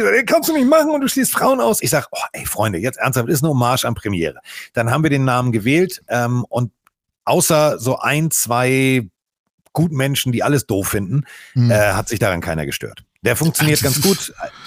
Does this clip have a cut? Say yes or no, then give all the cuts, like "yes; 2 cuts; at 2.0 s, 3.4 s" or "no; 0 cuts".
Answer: no; 0 cuts